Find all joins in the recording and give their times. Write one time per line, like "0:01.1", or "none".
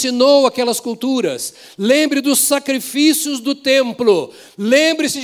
none